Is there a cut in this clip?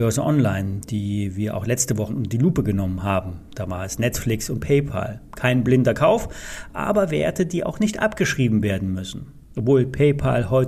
yes; 1 cut; at 2.1 s

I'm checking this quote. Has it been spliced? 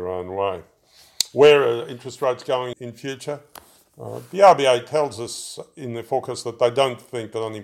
yes; 1 cut; at 2.7 s

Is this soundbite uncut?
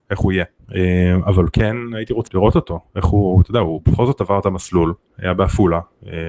no; 1 cut; at 2.3 s

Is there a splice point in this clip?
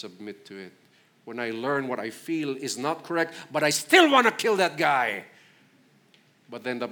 no; 0 cuts

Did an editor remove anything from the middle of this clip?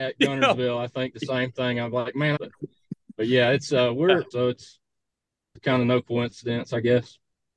yes; 2 cuts; at 2.4 s, 4.3 s

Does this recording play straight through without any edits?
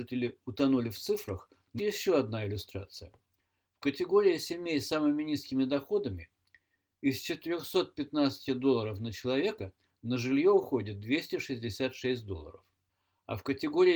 no; 1 cut; at 1.8 s

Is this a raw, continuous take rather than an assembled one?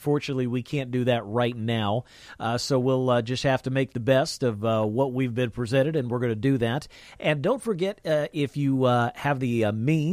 yes; 0 cuts

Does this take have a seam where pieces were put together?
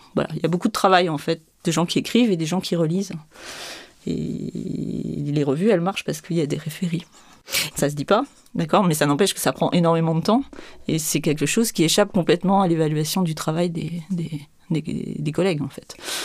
yes; 1 cut; at 7.7 s

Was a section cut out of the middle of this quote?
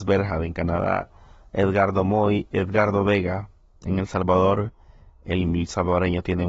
no; 0 cuts

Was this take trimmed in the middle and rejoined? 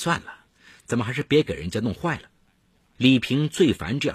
yes; 1 cut; at 3.0 s

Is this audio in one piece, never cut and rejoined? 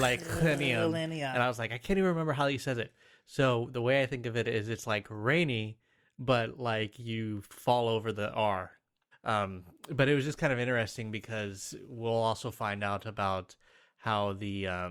no; 1 cut; at 9.1 s

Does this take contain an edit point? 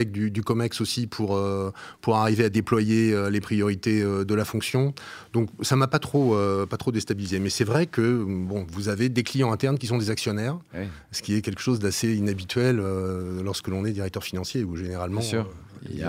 no; 0 cuts

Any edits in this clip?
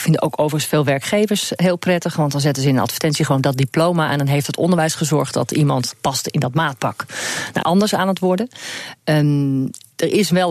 yes; 1 cut; at 7.6 s

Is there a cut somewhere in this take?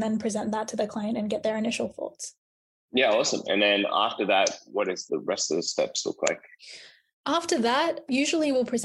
no; 0 cuts

